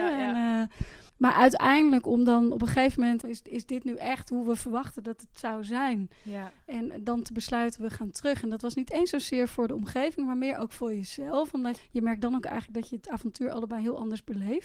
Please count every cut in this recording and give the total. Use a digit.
3